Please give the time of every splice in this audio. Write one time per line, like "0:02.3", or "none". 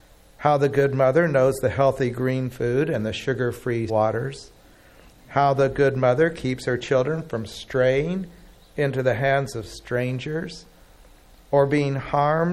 0:03.9